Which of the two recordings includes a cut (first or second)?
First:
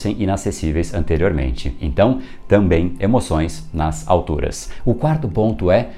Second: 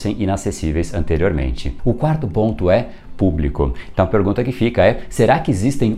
second